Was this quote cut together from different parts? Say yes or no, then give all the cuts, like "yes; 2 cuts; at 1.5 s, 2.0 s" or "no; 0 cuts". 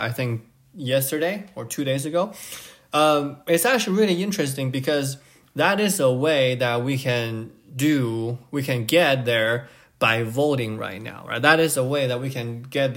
no; 0 cuts